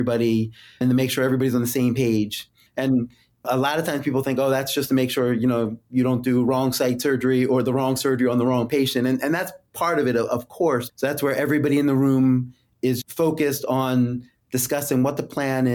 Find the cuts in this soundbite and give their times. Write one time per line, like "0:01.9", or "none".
0:10.9
0:13.0